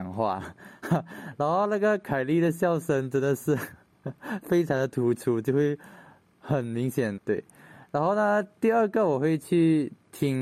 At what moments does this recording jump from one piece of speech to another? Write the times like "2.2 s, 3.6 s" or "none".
7.2 s